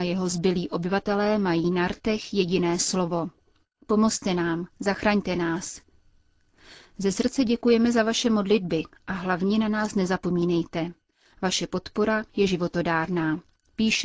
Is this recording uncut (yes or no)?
yes